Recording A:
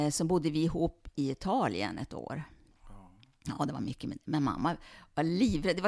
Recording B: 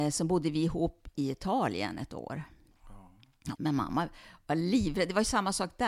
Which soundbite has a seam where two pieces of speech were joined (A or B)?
B